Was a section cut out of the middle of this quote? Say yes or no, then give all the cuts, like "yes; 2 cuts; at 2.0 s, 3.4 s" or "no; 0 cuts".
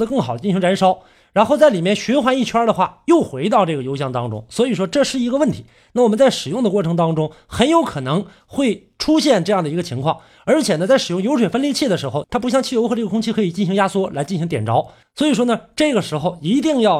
yes; 2 cuts; at 12.2 s, 15.0 s